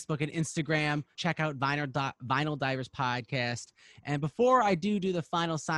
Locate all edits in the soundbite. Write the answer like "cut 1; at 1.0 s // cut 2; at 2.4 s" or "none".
cut 1; at 1.2 s